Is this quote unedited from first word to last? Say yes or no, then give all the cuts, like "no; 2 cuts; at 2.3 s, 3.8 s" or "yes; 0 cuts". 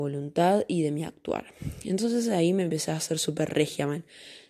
yes; 0 cuts